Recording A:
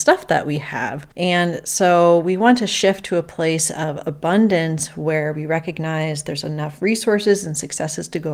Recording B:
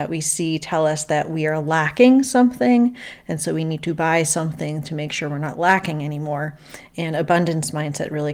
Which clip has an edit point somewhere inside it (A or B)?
A